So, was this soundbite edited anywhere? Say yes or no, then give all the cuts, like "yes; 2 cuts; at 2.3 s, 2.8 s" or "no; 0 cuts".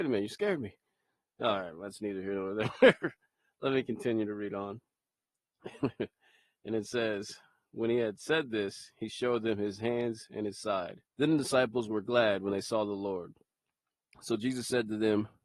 yes; 1 cut; at 11.1 s